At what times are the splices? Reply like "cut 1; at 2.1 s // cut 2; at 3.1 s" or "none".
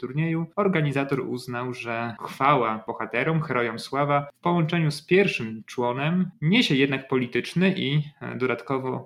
cut 1; at 6.3 s